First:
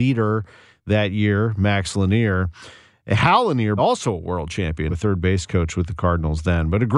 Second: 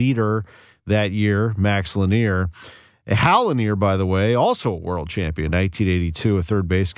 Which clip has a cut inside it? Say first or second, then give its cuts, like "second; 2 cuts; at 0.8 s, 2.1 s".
first; 2 cuts; at 3.8 s, 4.9 s